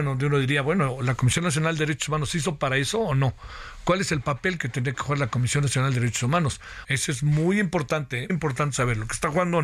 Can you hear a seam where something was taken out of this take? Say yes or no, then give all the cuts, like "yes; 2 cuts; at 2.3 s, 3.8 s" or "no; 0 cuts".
yes; 2 cuts; at 6.8 s, 8.3 s